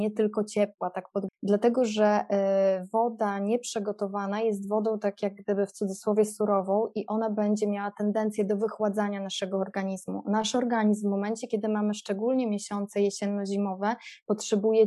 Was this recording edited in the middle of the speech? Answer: yes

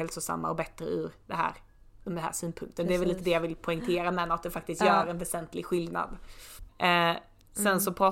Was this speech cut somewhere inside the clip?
yes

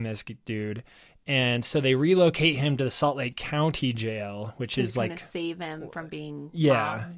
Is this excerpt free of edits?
yes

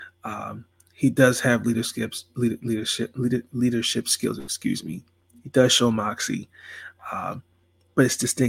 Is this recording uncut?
yes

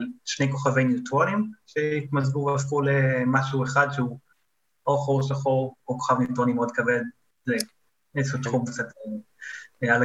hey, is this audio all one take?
yes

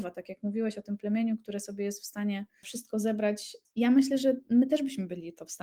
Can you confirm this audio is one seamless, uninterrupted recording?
yes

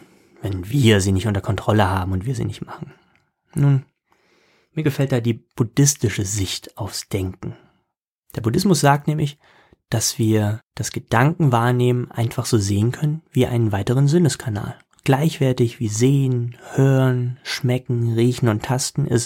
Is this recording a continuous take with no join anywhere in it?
yes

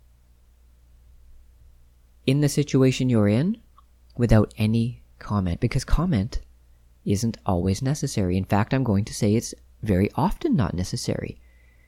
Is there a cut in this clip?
no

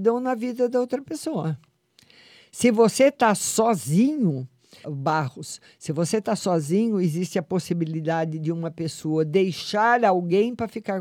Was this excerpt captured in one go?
no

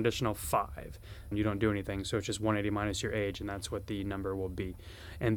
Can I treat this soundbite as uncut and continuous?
no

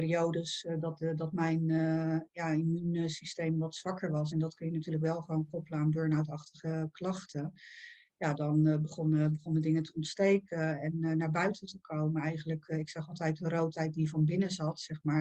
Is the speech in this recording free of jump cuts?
yes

